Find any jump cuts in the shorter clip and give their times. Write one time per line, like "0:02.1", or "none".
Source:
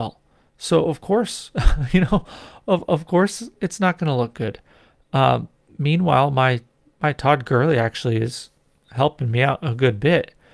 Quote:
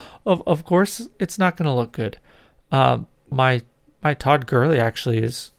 0:03.3

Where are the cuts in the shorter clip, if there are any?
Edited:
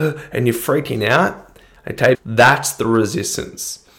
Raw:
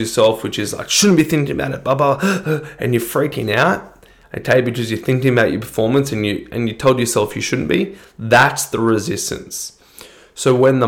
0:02.1

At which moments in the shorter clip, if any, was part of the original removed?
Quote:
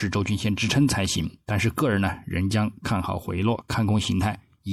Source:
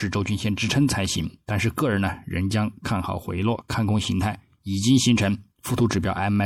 none

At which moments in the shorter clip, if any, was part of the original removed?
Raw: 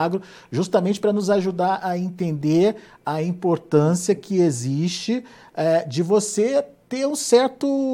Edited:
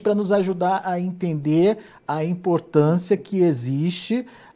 none

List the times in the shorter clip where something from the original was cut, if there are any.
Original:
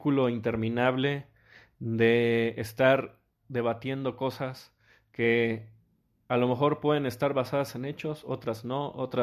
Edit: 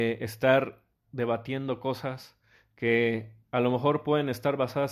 0:03.4

